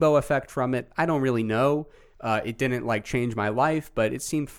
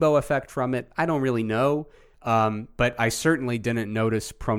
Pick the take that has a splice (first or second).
second